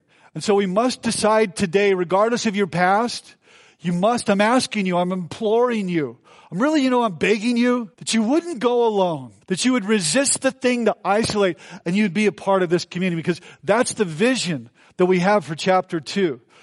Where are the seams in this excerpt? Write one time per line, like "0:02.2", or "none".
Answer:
0:07.9
0:09.4